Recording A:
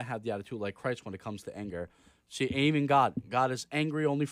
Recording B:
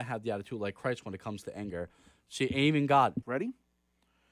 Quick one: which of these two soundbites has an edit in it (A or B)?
B